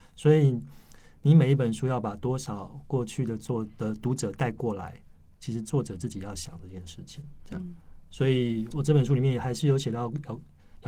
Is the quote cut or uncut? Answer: cut